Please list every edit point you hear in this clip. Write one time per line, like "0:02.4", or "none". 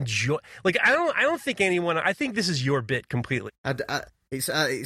0:03.5